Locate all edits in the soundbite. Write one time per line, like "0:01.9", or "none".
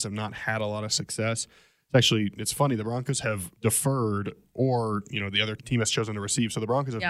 0:03.6
0:05.6

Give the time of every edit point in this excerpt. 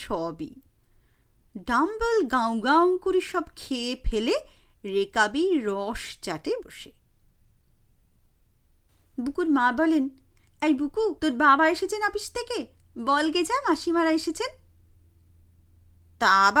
0:06.6
0:11.2

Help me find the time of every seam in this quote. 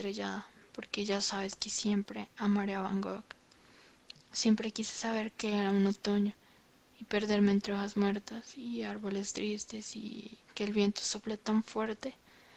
0:04.1

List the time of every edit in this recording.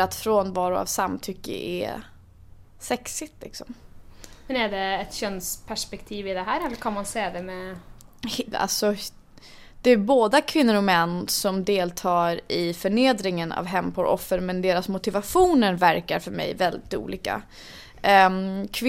0:08.5

